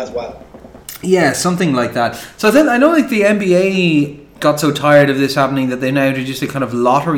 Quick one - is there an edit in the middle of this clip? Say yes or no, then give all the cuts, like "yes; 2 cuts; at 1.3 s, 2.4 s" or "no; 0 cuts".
no; 0 cuts